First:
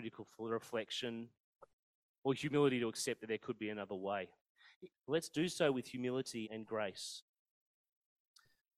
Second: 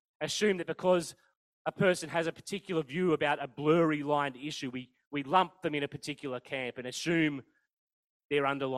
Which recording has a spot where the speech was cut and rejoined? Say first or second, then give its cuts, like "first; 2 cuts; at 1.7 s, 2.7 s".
first; 2 cuts; at 4.9 s, 6.4 s